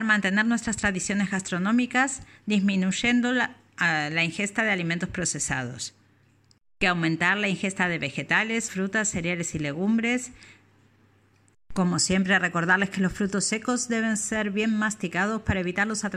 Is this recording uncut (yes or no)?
no